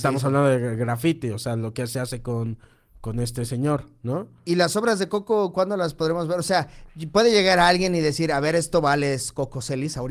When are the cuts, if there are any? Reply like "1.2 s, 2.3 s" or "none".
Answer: none